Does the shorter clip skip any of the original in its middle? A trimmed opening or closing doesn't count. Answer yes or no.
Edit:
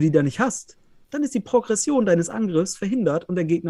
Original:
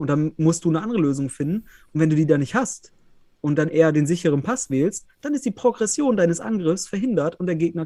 yes